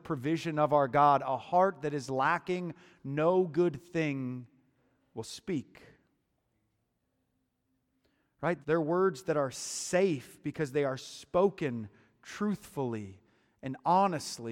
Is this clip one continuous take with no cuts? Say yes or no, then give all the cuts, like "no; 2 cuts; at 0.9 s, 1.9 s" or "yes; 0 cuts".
no; 1 cut; at 8.6 s